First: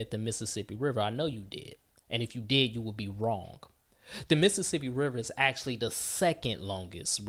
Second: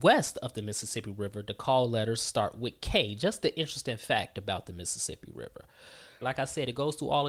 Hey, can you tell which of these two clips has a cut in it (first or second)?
second